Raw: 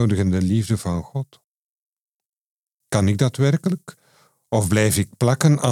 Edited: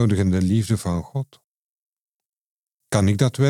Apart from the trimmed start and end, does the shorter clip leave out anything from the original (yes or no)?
no